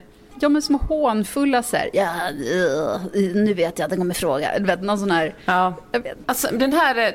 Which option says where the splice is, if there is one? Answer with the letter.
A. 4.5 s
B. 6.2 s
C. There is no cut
B